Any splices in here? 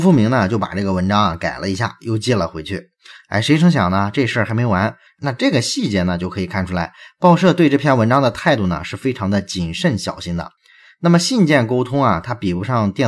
yes; 1 cut; at 5.1 s

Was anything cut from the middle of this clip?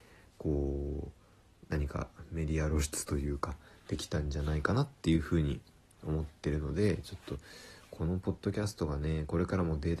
no; 0 cuts

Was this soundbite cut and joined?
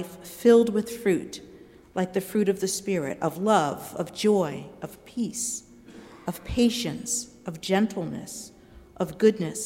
no; 0 cuts

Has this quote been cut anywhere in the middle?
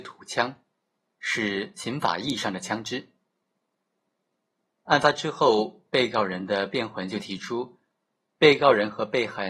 no; 0 cuts

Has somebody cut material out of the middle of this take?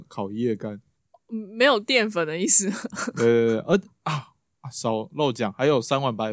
no; 0 cuts

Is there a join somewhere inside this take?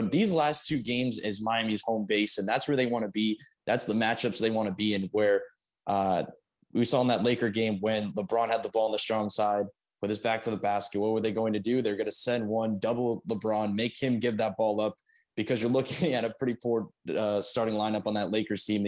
no; 0 cuts

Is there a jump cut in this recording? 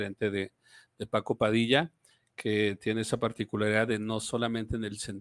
no; 0 cuts

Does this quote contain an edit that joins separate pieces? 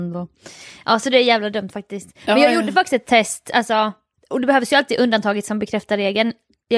no; 0 cuts

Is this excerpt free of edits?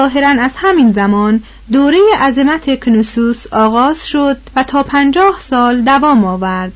no; 1 cut; at 4.5 s

